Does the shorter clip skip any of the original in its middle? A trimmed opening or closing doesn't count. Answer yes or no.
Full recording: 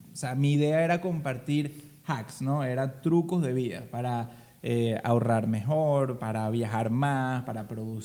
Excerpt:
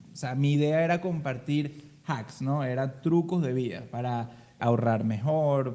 yes